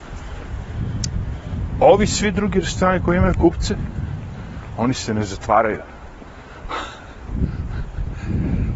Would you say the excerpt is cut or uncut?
uncut